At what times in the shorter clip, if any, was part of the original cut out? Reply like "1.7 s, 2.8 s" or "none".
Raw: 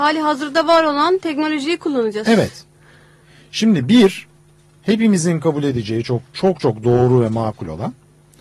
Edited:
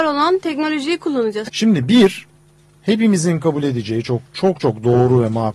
1.4 s